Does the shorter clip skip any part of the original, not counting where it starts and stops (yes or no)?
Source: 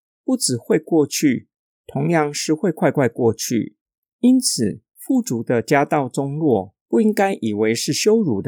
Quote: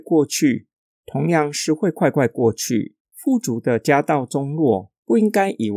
yes